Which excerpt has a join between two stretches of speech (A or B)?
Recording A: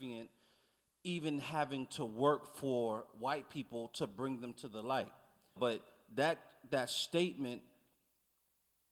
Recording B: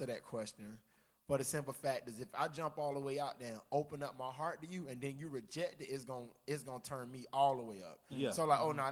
A